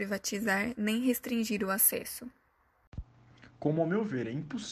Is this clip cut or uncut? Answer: uncut